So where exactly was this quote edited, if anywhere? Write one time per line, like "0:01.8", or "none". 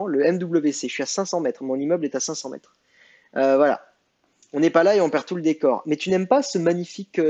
none